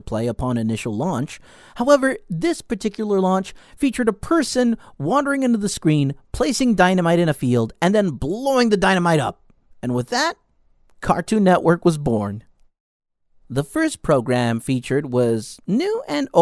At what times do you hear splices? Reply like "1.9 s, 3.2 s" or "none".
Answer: none